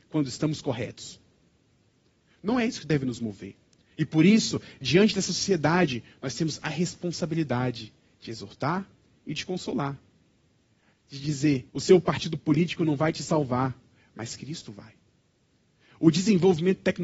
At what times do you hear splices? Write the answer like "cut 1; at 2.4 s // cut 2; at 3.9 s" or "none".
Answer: cut 1; at 3.8 s // cut 2; at 11.7 s